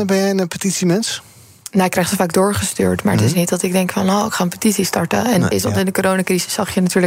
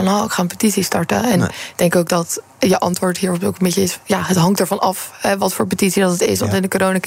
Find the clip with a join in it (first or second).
first